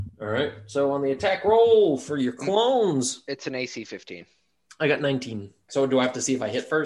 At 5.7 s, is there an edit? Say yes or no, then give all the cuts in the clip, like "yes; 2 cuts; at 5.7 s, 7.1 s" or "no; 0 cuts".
yes; 1 cut; at 5.7 s